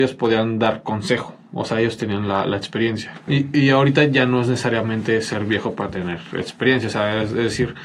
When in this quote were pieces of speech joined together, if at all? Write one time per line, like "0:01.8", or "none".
0:03.3